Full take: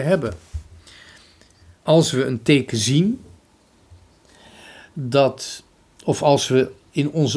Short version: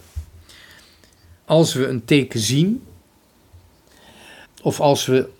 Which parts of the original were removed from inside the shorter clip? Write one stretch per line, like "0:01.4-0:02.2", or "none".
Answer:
0:04.8-0:05.9

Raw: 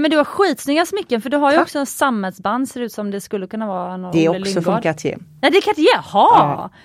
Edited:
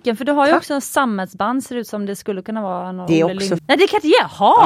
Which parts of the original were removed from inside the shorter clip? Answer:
0:04.6-0:05.3

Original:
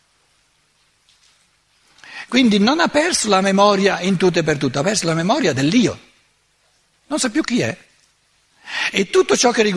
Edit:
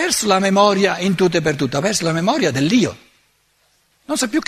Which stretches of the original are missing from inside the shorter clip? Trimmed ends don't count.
none

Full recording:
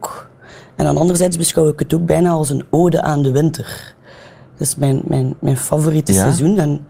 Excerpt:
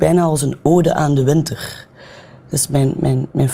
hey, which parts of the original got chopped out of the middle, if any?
none

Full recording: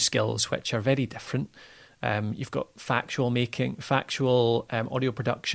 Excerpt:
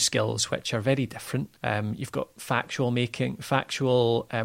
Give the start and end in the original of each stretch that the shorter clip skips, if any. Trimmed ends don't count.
0:01.6-0:02.0

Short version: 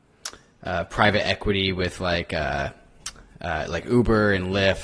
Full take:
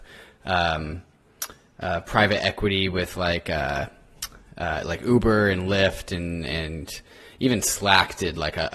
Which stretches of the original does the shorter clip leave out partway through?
none

